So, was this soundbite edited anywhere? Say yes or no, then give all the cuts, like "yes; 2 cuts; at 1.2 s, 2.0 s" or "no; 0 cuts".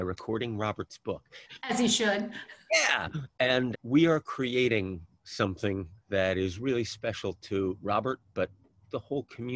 yes; 2 cuts; at 1.5 s, 3.7 s